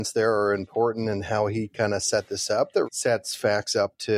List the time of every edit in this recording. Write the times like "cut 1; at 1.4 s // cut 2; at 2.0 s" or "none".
cut 1; at 2.8 s